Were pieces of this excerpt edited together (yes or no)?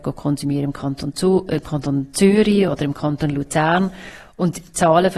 no